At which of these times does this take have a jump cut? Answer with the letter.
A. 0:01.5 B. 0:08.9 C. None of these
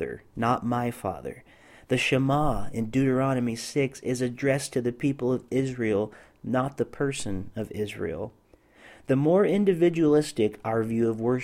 C